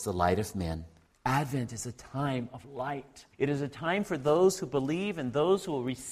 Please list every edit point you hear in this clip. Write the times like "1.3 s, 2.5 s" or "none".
1.1 s, 3.3 s